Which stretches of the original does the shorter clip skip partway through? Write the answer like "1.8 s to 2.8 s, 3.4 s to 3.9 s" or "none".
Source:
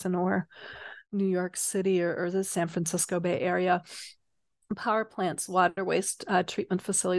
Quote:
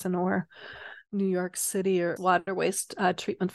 2.2 s to 5.5 s

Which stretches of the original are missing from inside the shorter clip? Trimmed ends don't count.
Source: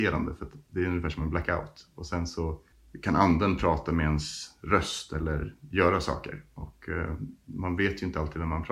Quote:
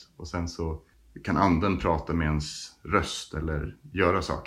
none

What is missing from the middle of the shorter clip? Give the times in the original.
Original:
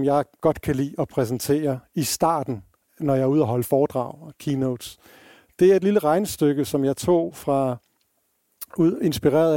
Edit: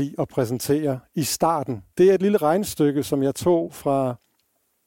2.7 s to 5.5 s

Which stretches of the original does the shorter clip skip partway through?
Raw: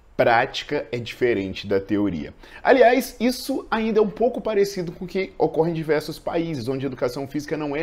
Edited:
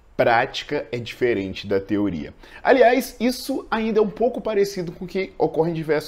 none

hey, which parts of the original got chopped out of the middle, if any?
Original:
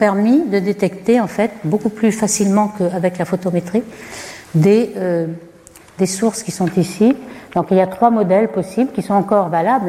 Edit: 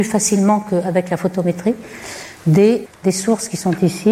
4.9 s to 5.8 s

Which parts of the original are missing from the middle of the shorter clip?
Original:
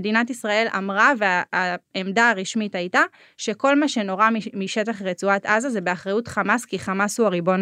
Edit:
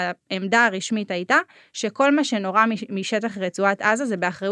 none

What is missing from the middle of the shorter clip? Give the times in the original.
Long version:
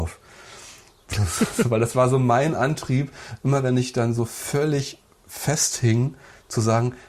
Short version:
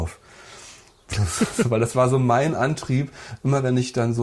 none

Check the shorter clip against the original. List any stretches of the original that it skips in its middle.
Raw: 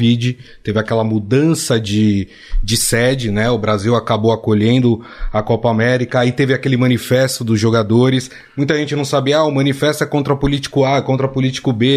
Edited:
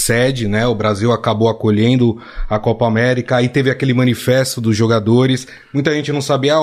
none

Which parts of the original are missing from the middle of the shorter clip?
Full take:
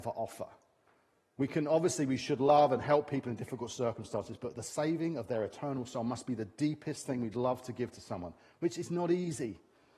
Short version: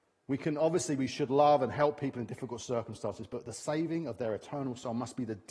none

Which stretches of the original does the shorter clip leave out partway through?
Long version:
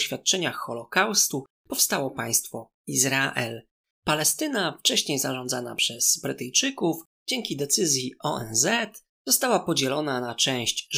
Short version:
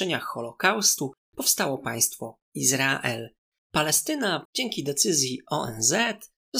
4.8 s to 7.2 s

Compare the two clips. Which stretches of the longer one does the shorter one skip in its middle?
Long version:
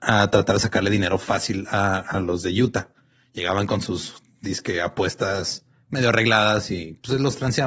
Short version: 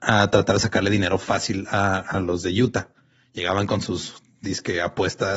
none

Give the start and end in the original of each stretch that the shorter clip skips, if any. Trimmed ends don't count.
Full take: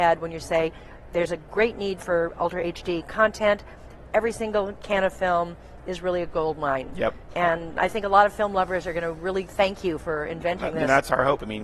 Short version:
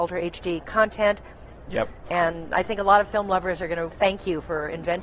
4.1 s to 6.9 s, 9.1 s to 9.5 s

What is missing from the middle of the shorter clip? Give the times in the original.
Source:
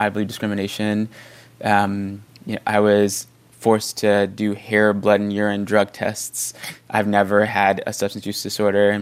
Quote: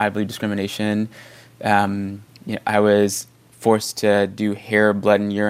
none

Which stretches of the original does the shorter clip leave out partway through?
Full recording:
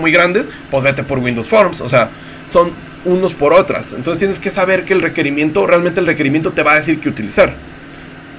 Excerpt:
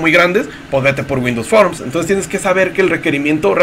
1.8 s to 3.9 s

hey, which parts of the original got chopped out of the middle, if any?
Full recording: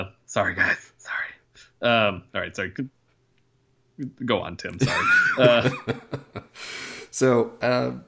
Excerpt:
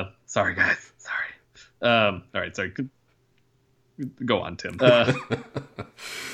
4.8 s to 5.4 s

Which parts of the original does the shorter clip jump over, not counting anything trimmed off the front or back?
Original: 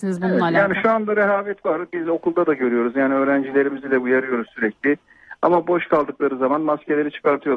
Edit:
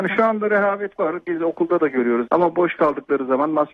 2.9 s to 5.4 s

